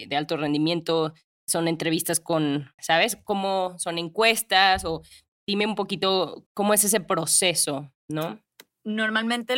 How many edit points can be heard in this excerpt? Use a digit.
2